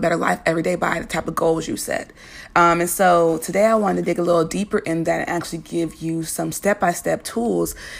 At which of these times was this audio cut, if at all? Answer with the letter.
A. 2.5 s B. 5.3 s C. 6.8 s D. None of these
D